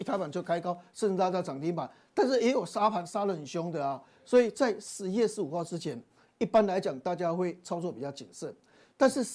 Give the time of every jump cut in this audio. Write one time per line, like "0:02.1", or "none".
none